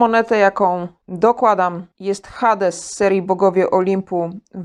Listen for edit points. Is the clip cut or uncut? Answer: uncut